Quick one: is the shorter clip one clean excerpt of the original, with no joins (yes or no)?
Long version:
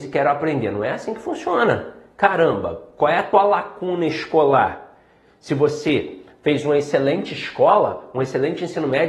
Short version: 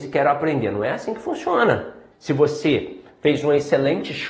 no